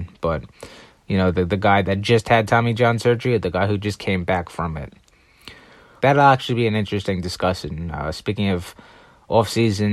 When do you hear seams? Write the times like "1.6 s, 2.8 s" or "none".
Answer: 6.0 s